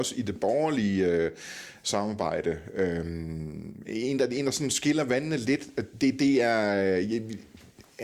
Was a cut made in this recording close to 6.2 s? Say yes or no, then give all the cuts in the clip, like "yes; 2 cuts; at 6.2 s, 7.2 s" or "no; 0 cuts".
no; 0 cuts